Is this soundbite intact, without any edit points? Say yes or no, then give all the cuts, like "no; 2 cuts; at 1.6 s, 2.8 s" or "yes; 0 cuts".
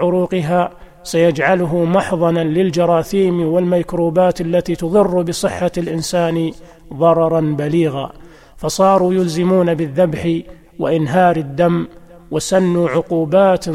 yes; 0 cuts